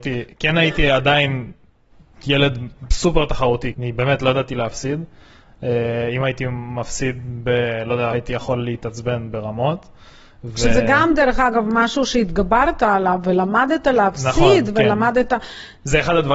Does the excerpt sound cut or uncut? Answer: cut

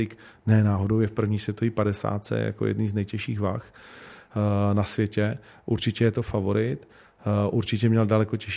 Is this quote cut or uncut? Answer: uncut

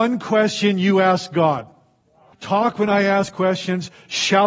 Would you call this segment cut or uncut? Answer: cut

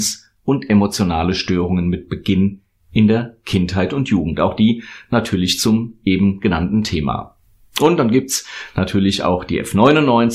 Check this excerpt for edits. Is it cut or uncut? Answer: uncut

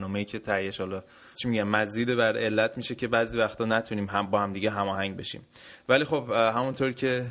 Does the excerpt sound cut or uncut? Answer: cut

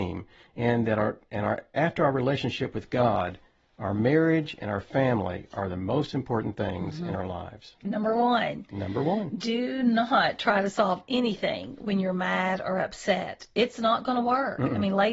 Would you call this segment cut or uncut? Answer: cut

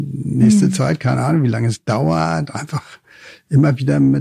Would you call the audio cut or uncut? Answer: uncut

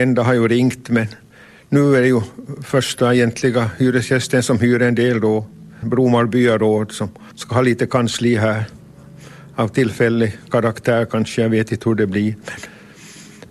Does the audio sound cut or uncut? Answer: cut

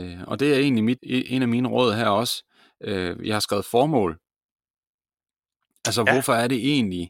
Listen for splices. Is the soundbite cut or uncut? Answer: cut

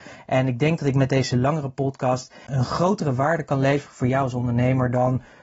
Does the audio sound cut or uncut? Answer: cut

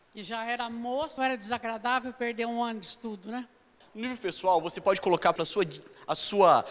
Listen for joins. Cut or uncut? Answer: cut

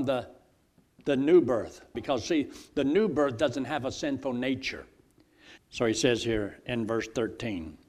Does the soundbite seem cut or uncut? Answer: cut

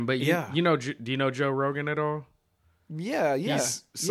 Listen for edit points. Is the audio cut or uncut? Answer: uncut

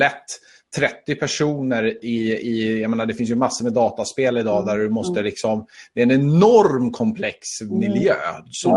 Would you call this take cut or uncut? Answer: uncut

